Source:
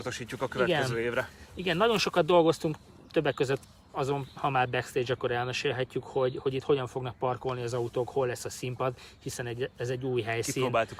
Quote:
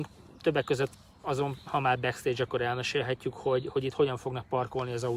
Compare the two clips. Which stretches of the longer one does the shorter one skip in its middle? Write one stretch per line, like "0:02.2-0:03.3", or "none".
none